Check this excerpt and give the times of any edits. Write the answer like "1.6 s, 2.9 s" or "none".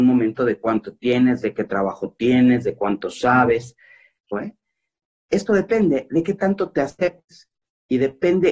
4.3 s